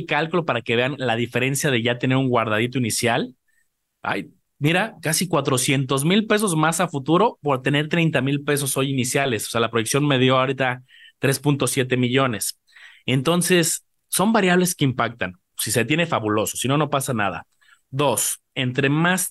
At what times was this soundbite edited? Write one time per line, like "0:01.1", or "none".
0:15.5

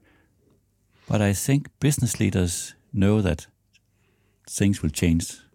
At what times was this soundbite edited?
0:01.7

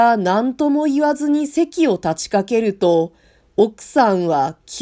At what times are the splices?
none

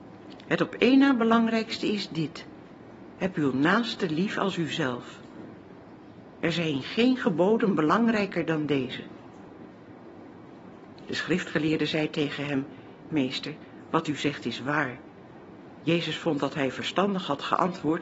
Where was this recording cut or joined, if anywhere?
0:13.1
0:15.8

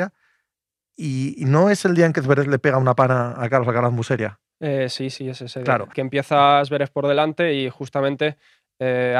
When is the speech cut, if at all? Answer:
0:03.4
0:05.9

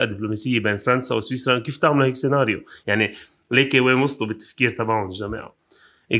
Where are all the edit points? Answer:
none

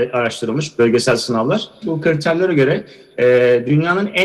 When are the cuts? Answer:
0:01.8

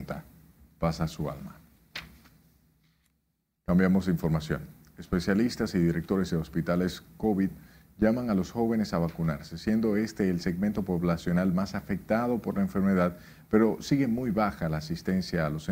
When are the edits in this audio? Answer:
none

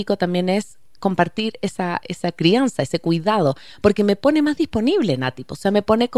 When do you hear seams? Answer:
none

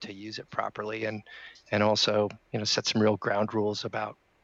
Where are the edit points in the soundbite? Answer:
none

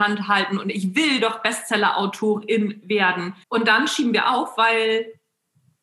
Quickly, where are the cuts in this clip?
0:03.4

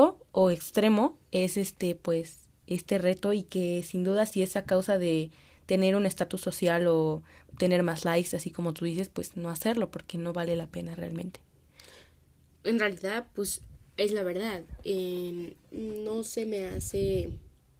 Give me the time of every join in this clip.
0:15.6

